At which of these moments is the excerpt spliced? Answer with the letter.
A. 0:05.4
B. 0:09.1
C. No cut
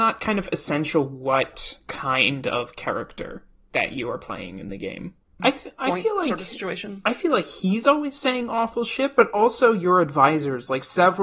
A